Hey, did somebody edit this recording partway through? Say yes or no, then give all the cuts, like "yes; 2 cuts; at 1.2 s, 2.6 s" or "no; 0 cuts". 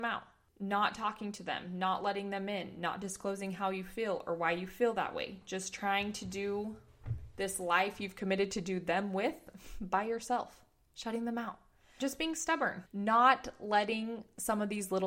no; 0 cuts